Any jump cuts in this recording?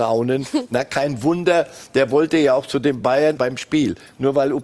yes; 1 cut; at 3.4 s

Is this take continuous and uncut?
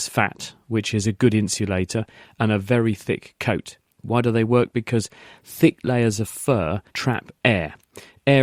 no; 2 cuts; at 4.0 s, 6.9 s

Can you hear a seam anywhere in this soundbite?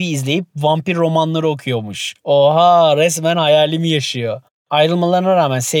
no; 0 cuts

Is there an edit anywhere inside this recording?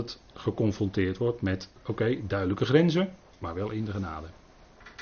no; 0 cuts

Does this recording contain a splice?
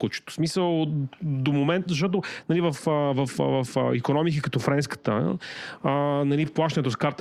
no; 0 cuts

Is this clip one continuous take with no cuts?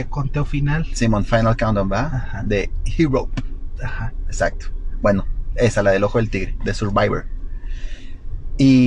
yes; 0 cuts

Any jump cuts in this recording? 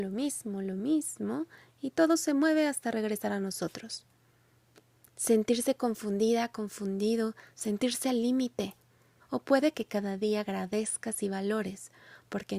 yes; 3 cuts; at 5.1 s, 7.5 s, 9.2 s

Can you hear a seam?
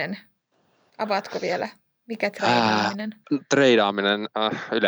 yes; 1 cut; at 3.2 s

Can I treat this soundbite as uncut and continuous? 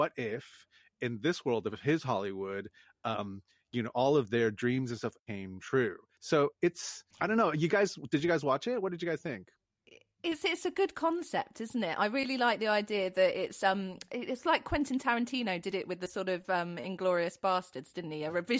no; 2 cuts; at 5.2 s, 7.1 s

